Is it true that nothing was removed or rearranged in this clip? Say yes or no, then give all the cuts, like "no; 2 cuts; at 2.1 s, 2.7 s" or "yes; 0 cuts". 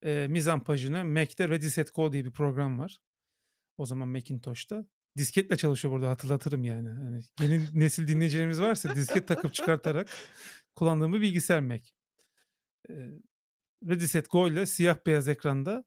yes; 0 cuts